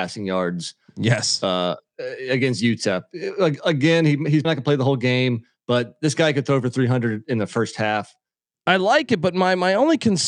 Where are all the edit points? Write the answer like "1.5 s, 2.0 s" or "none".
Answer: 4.4 s, 8.5 s

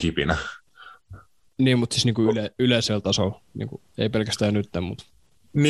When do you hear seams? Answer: 1.5 s, 3.9 s

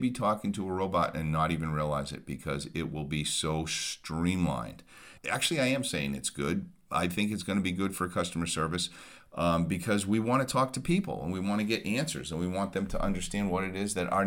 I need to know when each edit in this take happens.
5.2 s

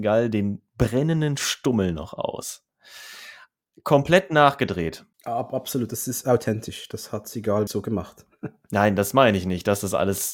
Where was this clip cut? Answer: 7.7 s

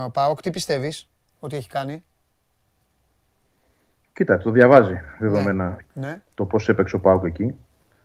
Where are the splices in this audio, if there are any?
5.8 s

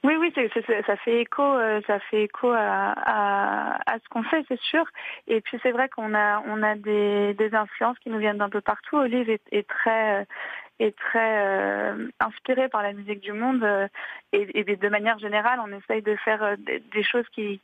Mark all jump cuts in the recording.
none

